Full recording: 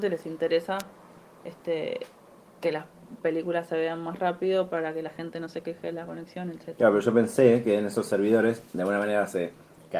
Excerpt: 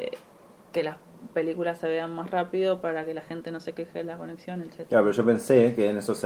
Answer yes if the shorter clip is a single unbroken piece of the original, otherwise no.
yes